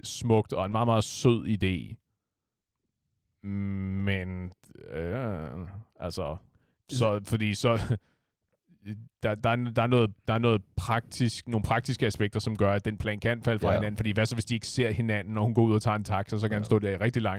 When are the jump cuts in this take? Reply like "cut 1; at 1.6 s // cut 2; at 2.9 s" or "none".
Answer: none